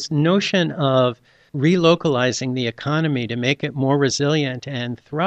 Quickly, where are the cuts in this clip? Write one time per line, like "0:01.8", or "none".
none